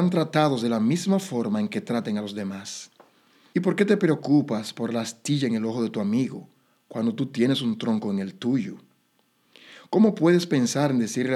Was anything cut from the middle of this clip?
yes; 1 cut; at 3.5 s

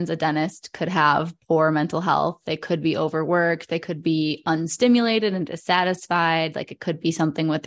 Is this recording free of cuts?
yes; 0 cuts

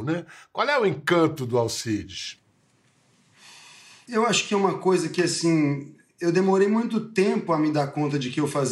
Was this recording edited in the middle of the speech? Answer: no; 0 cuts

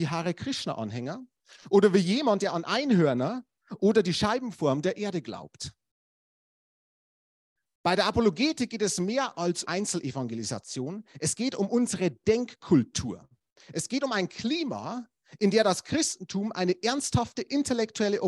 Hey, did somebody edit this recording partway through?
yes; 1 cut; at 9.6 s

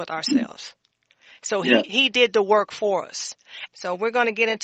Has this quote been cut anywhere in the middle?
yes; 1 cut; at 3.7 s

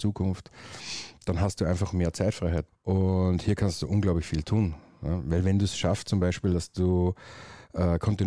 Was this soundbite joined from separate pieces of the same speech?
yes; 1 cut; at 2.7 s

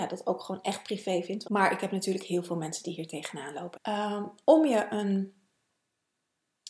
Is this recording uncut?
no; 2 cuts; at 1.4 s, 3.7 s

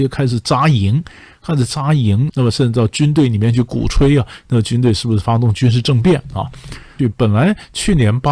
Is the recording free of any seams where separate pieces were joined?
no; 2 cuts; at 2.3 s, 7.0 s

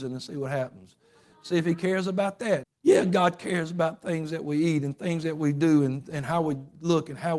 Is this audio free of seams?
no; 1 cut; at 2.6 s

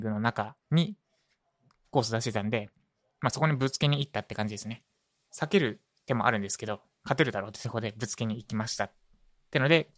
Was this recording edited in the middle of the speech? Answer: no; 0 cuts

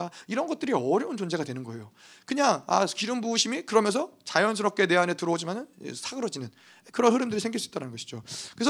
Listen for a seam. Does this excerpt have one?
no; 0 cuts

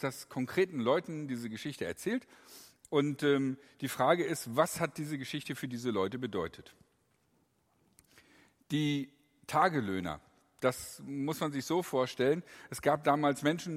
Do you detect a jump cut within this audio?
no; 0 cuts

